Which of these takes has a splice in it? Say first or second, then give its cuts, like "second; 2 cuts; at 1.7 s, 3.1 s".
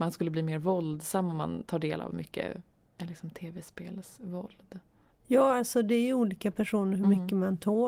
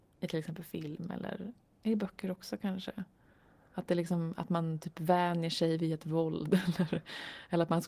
first; 1 cut; at 5.1 s